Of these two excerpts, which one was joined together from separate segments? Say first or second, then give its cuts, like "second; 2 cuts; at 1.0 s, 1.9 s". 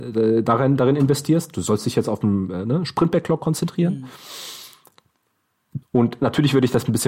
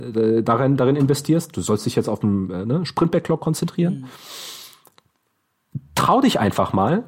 first; 1 cut; at 5.8 s